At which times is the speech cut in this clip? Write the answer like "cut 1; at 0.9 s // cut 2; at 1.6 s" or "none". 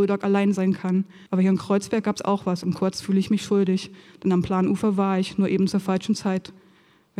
cut 1; at 1.3 s